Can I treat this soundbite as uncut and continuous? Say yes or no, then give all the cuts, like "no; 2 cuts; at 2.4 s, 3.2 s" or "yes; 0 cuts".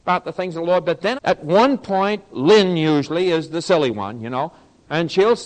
no; 1 cut; at 1.2 s